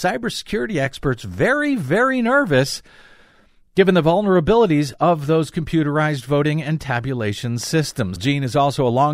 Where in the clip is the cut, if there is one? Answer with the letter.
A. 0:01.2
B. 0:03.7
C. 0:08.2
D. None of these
C